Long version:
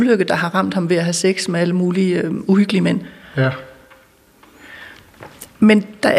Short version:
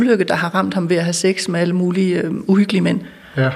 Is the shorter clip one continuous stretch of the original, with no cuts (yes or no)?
yes